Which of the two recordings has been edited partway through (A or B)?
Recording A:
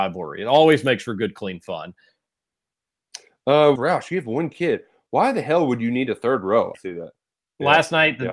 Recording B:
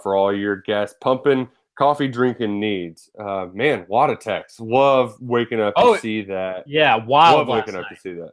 A